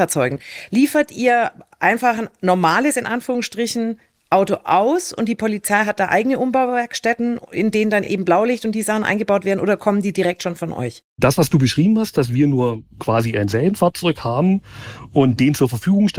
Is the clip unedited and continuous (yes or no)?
yes